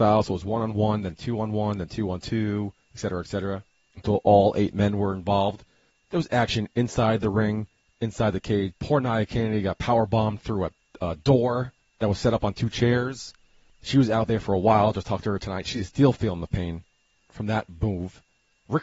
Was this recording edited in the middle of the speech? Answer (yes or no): yes